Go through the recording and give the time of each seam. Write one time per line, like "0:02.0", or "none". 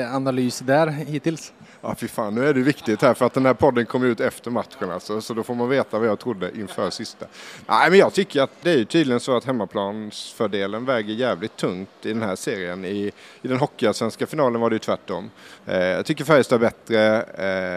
0:08.6
0:15.6